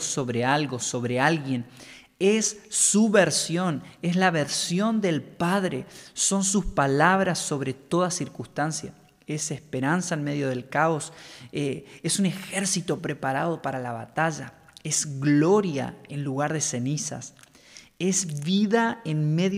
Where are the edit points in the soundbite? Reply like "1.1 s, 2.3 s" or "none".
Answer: none